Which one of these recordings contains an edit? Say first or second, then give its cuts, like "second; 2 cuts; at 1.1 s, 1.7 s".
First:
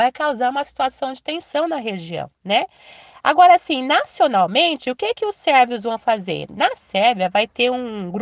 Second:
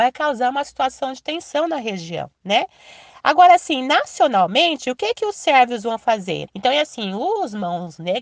second; 1 cut; at 6.5 s